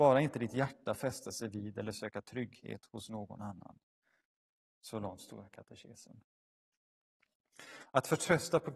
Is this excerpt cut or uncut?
uncut